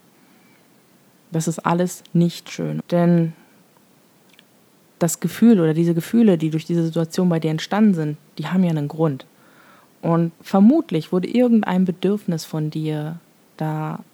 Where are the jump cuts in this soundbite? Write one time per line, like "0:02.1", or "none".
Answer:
0:02.8
0:10.4